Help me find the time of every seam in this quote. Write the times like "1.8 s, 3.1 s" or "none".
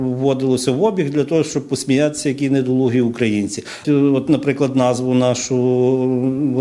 3.8 s